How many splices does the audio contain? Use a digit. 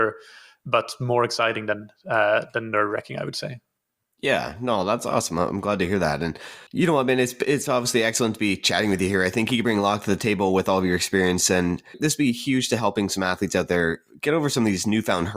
0